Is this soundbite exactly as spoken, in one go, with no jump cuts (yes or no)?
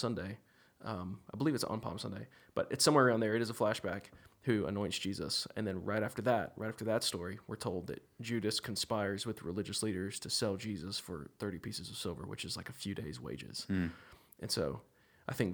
yes